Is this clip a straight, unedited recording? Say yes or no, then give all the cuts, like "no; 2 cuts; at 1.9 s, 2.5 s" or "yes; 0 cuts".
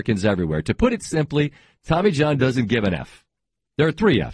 yes; 0 cuts